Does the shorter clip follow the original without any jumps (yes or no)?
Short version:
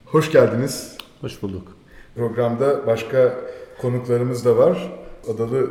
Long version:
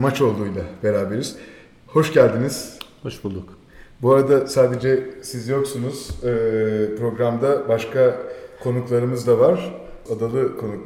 no